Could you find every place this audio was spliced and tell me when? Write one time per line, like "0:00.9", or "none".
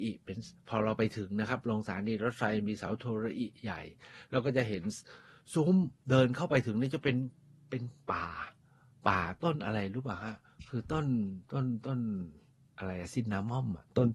none